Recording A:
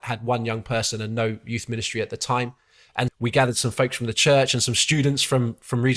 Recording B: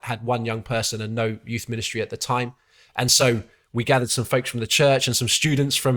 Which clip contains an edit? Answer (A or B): A